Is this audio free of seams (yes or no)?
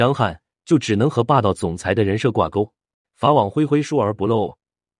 no